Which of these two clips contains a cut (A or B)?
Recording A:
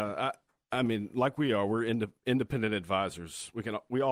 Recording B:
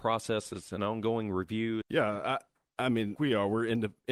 B